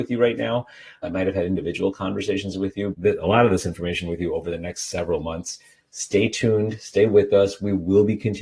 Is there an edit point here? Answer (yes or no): yes